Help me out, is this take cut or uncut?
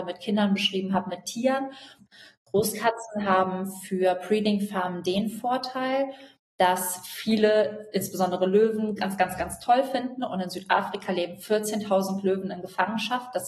cut